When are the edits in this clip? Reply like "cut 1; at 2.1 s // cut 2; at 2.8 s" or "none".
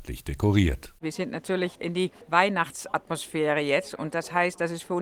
none